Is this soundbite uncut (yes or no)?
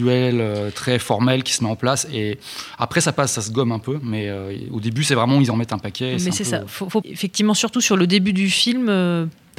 no